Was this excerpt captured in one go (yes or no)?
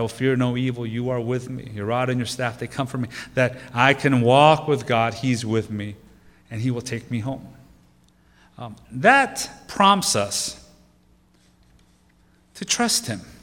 yes